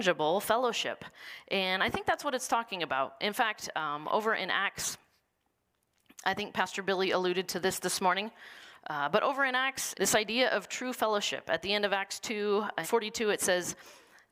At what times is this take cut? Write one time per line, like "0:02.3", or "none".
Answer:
0:09.9
0:12.8